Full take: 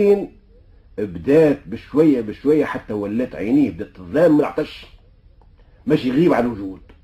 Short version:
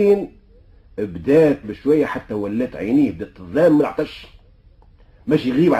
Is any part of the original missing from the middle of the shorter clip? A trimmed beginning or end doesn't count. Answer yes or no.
yes